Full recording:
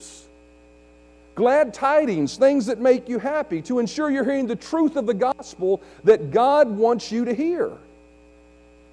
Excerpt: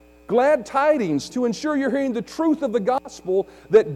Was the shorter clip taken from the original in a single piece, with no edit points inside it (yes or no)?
no